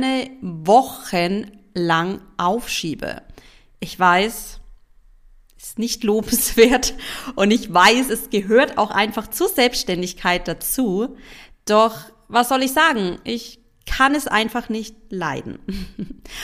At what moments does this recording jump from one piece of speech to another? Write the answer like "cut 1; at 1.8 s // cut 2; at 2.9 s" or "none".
none